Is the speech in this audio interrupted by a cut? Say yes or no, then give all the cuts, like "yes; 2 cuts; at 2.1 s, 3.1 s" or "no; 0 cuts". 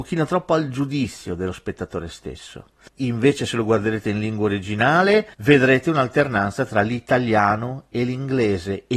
yes; 2 cuts; at 2.9 s, 5.3 s